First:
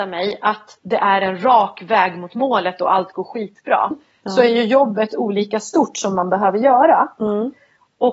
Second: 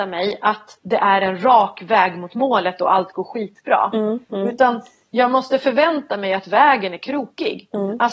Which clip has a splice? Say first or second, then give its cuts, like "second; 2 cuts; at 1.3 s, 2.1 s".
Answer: first; 1 cut; at 3.9 s